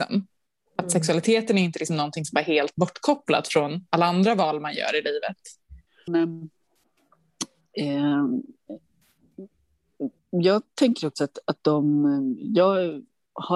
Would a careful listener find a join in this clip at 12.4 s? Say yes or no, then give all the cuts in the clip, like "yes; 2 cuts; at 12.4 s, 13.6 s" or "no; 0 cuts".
no; 2 cuts; at 6.1 s, 10.2 s